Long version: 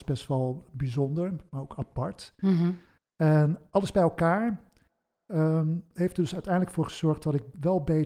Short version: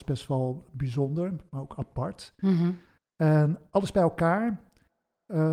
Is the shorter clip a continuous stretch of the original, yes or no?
yes